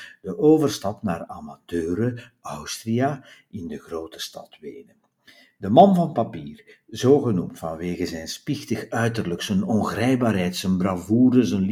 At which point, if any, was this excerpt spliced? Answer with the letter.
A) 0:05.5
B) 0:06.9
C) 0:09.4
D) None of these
D